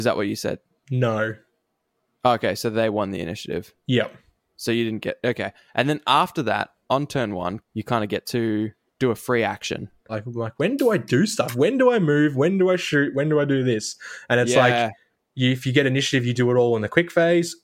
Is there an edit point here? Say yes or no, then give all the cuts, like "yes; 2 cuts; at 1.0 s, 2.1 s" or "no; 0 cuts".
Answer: yes; 2 cuts; at 7.6 s, 10.1 s